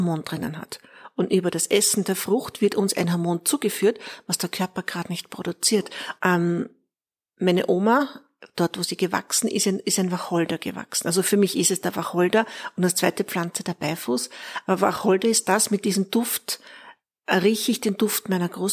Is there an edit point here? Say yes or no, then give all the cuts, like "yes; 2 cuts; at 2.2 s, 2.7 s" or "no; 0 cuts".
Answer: yes; 1 cut; at 6.2 s